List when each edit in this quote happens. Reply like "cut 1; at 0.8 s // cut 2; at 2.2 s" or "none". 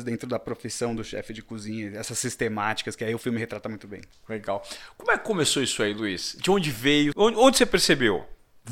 cut 1; at 7.1 s